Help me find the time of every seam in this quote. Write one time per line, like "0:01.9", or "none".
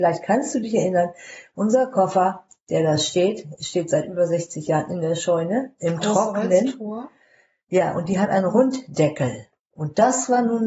none

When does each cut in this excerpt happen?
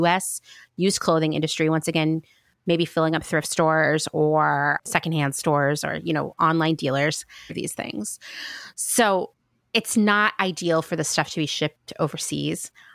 0:04.8
0:07.5

